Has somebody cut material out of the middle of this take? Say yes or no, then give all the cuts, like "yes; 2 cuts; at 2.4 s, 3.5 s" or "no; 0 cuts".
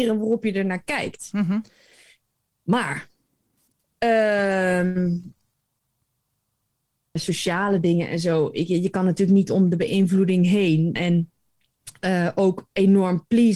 yes; 2 cuts; at 7.2 s, 11.0 s